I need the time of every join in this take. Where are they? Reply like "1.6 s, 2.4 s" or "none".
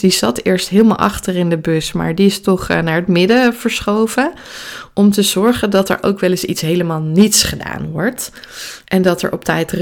none